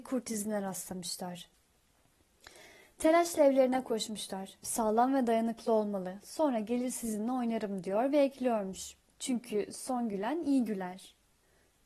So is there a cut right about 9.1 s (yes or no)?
yes